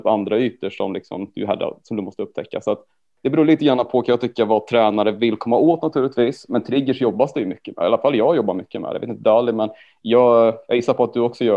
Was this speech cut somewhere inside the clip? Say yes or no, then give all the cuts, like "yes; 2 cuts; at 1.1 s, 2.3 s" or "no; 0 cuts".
no; 0 cuts